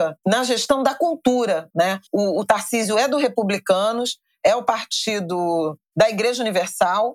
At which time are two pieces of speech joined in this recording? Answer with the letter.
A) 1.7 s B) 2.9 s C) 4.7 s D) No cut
A